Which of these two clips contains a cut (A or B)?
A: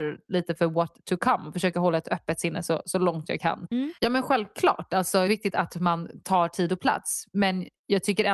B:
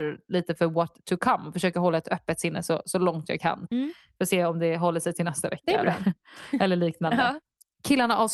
A